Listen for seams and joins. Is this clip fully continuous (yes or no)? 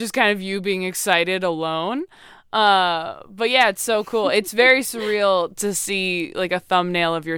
yes